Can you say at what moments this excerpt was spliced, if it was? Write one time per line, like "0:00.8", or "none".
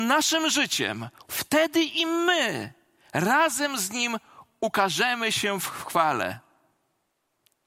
0:01.3